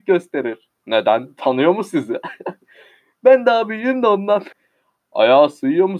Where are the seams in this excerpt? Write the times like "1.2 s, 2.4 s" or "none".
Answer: 4.5 s